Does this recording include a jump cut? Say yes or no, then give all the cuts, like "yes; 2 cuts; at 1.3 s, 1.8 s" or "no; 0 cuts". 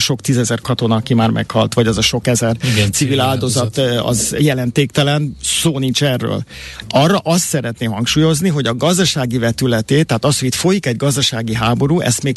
no; 0 cuts